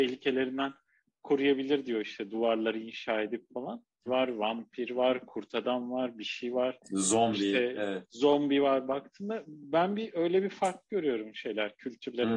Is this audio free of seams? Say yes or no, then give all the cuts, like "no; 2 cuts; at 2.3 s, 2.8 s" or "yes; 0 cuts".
no; 1 cut; at 4.1 s